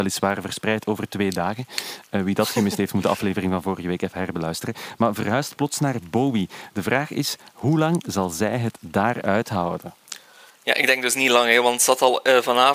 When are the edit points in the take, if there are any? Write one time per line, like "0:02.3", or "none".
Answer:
none

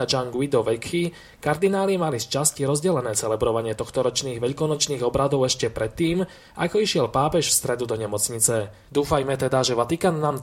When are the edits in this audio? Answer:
0:08.8

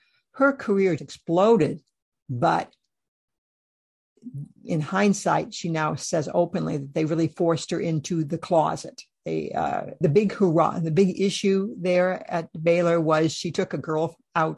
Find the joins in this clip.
0:01.0
0:10.0

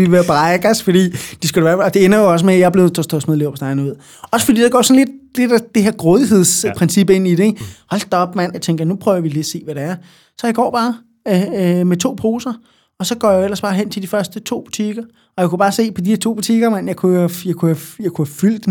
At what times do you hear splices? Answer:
0:08.5

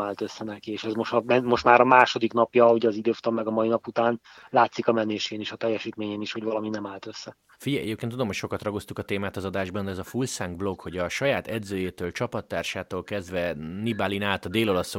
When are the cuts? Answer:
0:07.5

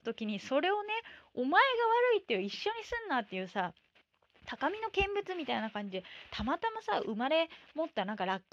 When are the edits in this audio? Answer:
none

